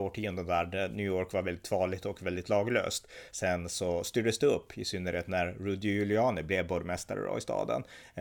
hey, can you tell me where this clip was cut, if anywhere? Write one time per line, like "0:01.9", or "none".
none